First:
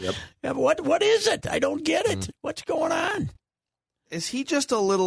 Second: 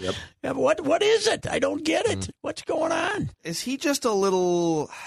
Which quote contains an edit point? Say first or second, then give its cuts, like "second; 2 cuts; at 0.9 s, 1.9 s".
second; 1 cut; at 3.4 s